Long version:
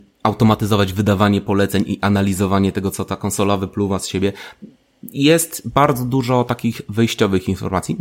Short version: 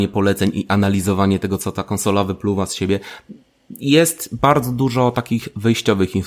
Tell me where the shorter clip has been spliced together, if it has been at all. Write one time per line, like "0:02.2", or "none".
none

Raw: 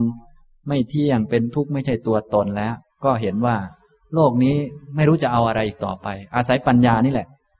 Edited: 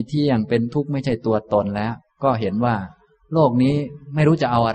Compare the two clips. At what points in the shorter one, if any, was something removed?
none

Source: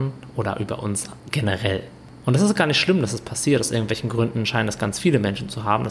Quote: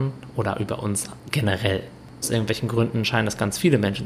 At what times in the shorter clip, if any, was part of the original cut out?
0:02.2

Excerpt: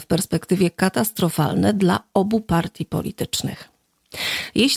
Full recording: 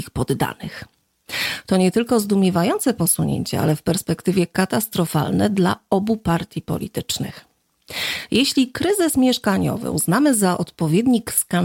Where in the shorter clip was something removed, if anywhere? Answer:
none

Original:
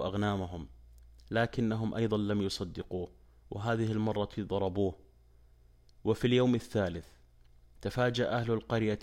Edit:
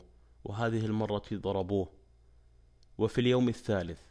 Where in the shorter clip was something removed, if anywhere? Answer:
none

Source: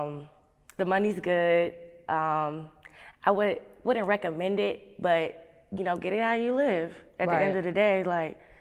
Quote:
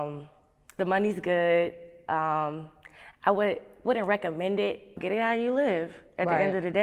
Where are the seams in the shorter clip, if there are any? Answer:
0:05.0

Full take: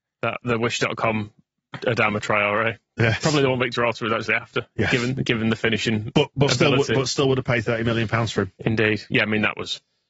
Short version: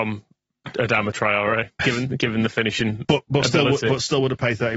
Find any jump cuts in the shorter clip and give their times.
0:01.8

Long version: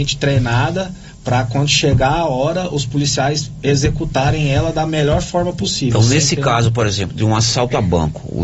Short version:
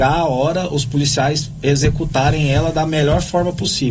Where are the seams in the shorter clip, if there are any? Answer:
none

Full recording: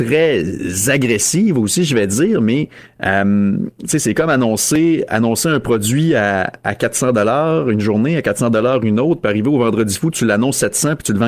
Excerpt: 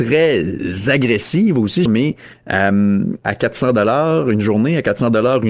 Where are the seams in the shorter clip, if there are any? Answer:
0:01.9
0:03.2

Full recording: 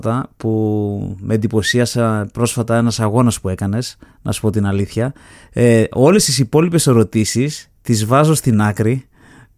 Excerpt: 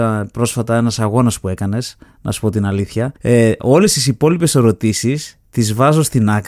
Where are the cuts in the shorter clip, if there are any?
0:03.2

